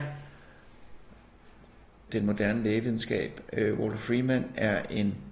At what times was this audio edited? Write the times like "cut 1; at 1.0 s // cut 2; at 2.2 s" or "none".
cut 1; at 2.1 s